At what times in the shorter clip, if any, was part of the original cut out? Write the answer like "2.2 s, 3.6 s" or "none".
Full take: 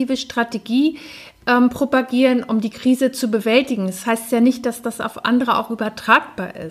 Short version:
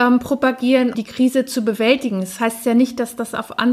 0.9 s